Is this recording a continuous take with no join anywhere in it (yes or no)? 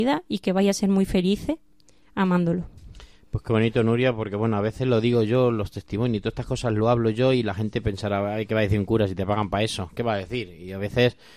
yes